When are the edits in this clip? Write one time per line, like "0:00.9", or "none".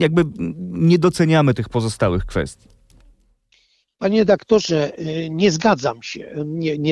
none